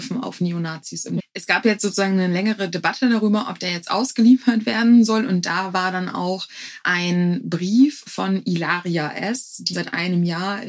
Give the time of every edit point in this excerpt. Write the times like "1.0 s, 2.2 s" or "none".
1.2 s, 9.7 s